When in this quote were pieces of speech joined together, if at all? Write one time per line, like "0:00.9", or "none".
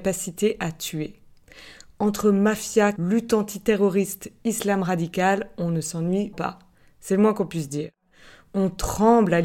0:03.0
0:06.3